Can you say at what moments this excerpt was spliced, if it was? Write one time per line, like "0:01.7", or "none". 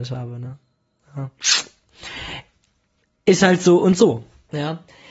none